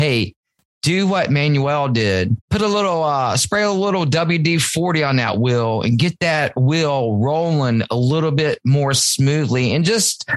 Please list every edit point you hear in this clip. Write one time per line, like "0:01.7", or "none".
0:02.4